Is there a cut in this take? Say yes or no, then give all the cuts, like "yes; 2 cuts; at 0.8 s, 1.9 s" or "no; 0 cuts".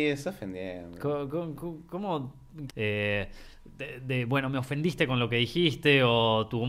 yes; 1 cut; at 2.7 s